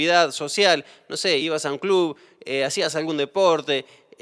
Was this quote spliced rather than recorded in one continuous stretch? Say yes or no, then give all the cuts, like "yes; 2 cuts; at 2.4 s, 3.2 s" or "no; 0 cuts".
no; 0 cuts